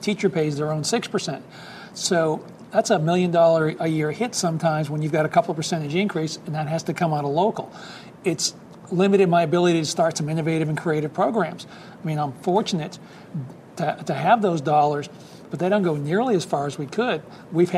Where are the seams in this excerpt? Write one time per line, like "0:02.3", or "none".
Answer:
none